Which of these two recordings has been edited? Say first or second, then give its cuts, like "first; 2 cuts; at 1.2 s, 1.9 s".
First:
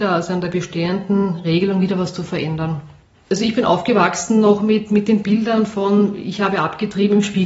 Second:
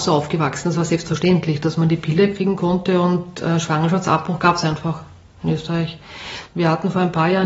second; 1 cut; at 6.5 s